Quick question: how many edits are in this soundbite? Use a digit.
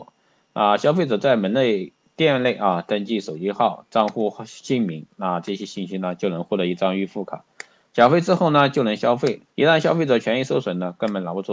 1